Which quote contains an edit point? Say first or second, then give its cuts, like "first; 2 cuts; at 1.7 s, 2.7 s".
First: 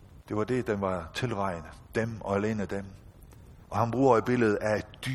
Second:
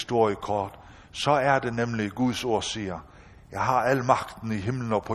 first; 1 cut; at 3.6 s